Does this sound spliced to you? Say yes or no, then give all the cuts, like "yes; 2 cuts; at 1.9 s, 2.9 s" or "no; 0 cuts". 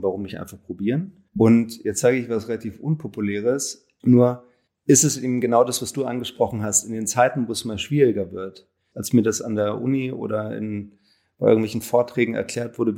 yes; 3 cuts; at 1.3 s, 4.0 s, 8.9 s